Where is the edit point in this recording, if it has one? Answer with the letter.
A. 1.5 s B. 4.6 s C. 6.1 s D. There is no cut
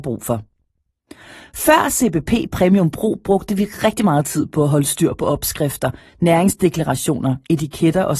D